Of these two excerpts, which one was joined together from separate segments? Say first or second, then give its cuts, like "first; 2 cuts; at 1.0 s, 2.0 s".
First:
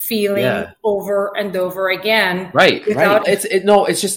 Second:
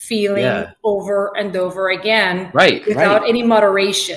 first; 1 cut; at 3.2 s